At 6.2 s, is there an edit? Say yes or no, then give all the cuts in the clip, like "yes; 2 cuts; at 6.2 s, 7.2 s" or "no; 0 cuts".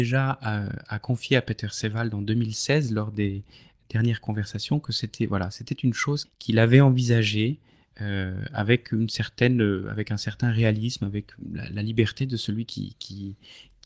yes; 1 cut; at 6.2 s